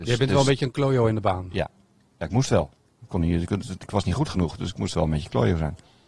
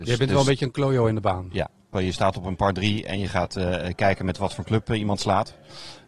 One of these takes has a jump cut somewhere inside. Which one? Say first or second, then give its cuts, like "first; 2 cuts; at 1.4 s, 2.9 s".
second; 1 cut; at 1.9 s